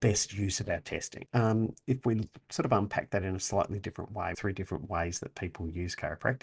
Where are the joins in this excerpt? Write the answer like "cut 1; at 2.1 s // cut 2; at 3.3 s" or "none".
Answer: cut 1; at 1.3 s // cut 2; at 4.3 s